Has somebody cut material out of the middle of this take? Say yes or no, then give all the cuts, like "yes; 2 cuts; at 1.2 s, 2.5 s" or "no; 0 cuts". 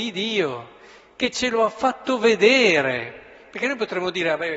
no; 0 cuts